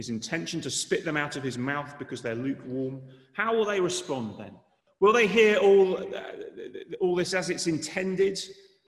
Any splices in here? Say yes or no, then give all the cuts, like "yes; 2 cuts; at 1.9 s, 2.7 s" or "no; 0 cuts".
no; 0 cuts